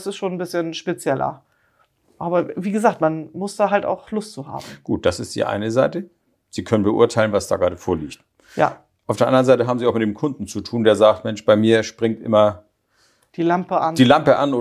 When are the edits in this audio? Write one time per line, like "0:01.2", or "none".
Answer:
none